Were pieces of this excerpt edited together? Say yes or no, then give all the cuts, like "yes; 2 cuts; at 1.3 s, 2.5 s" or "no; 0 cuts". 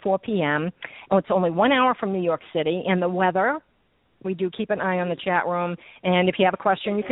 yes; 2 cuts; at 1.1 s, 4.2 s